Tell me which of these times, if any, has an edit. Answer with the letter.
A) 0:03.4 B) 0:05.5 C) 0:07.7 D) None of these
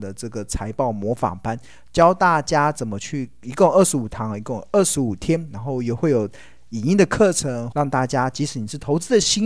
C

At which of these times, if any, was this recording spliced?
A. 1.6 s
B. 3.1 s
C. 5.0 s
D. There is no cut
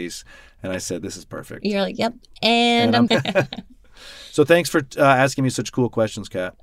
B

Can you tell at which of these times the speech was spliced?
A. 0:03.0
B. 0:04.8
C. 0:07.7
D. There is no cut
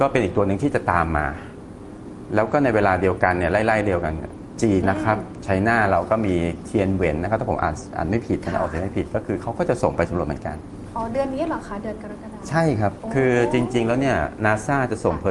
B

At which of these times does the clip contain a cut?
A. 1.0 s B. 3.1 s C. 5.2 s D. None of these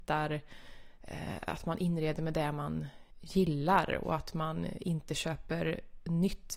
B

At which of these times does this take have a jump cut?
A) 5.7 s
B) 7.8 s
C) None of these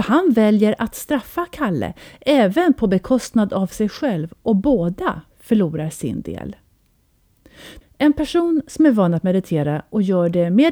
B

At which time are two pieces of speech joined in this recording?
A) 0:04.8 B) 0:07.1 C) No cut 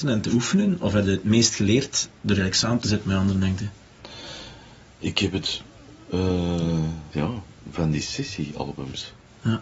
B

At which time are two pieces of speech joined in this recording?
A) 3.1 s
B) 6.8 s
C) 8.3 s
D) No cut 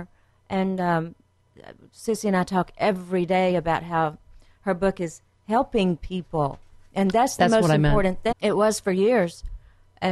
C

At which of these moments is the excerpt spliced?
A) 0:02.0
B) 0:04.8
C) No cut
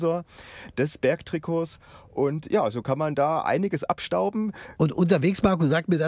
B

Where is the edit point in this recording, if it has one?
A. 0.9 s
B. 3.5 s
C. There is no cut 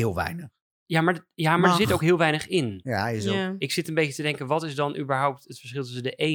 C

